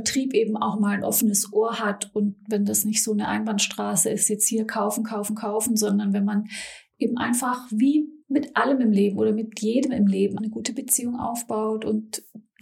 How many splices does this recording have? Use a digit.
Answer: 2